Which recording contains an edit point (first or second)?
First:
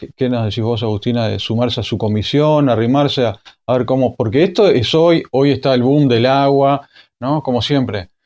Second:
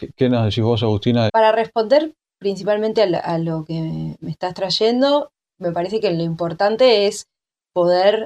second